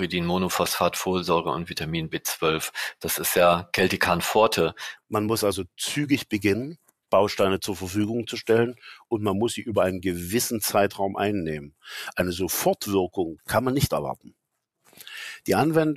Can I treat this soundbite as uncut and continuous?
no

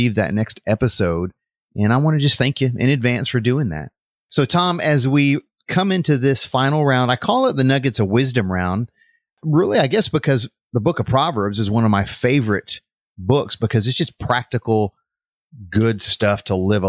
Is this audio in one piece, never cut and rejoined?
yes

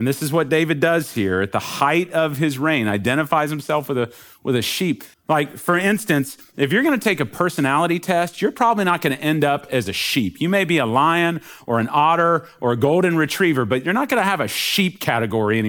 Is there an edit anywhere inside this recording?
yes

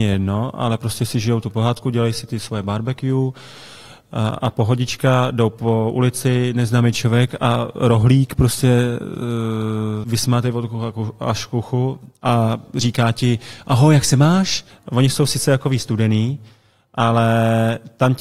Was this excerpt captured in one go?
no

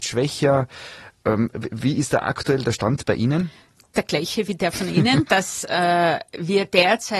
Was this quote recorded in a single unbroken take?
no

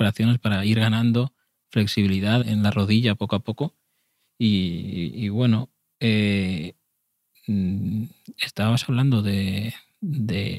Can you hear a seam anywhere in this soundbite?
yes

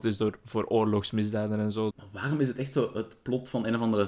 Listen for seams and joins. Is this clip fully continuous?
no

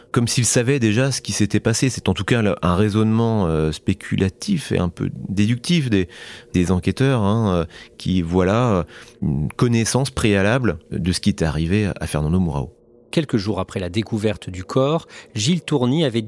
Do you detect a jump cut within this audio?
no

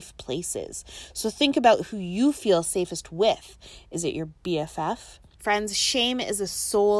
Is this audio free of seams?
no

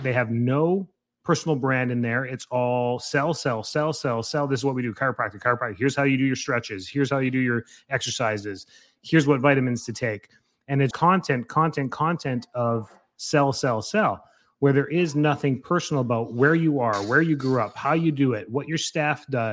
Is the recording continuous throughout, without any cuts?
no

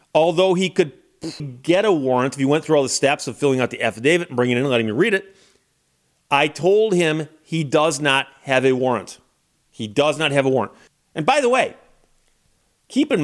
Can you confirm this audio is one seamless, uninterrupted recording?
no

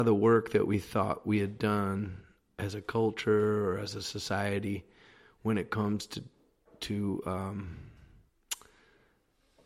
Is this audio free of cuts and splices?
yes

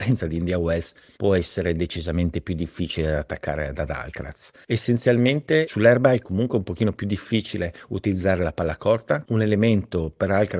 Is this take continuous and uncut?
no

